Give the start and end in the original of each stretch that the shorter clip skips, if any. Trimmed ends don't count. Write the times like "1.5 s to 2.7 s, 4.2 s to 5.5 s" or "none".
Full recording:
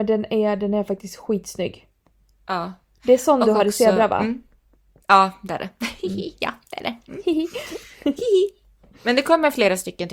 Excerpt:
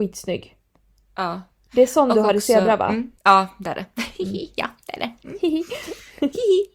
4.5 s to 5.0 s